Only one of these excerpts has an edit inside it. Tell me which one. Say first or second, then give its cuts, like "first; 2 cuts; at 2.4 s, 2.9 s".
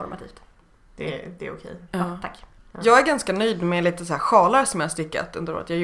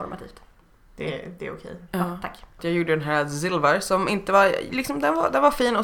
second; 1 cut; at 2.6 s